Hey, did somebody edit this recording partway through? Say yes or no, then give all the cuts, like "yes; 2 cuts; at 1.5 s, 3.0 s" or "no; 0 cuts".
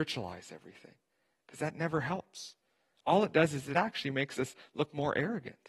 no; 0 cuts